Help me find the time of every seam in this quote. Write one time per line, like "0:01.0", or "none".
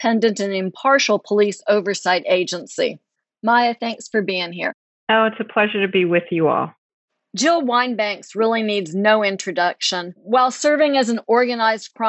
none